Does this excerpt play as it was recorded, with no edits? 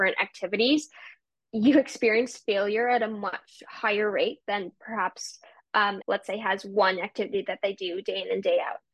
no; 1 cut; at 6.0 s

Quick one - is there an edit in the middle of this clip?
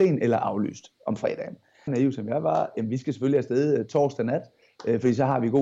yes; 1 cut; at 1.9 s

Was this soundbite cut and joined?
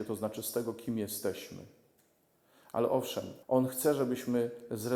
yes; 1 cut; at 3.4 s

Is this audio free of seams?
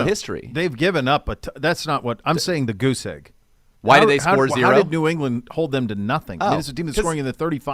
yes; 0 cuts

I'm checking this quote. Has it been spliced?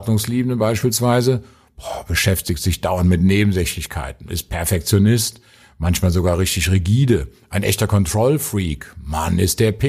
no; 0 cuts

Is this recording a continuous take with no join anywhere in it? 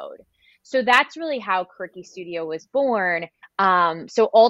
no; 1 cut; at 3.4 s

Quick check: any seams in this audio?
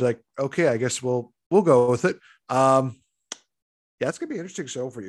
yes; 1 cut; at 2.4 s

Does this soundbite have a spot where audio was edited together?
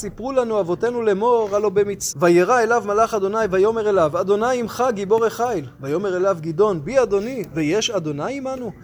yes; 1 cut; at 2.1 s

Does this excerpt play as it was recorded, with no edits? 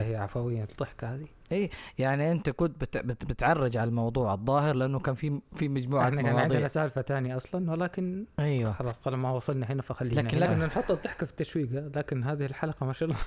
no; 1 cut; at 10.5 s

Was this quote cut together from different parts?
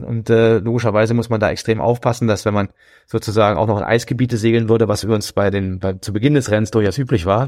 no; 0 cuts

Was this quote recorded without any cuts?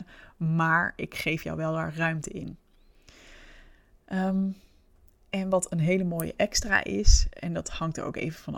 yes; 0 cuts

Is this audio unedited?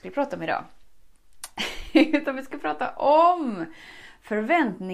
yes; 0 cuts

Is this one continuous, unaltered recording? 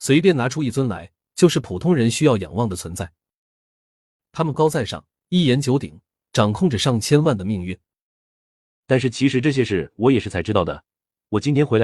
no; 2 cuts; at 4.5 s, 8.8 s

